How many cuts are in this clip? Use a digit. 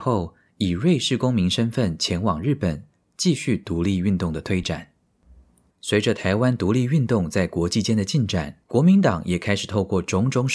2